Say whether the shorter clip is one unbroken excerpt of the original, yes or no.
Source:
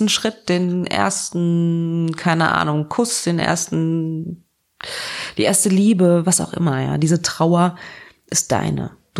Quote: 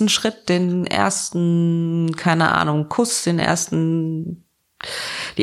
yes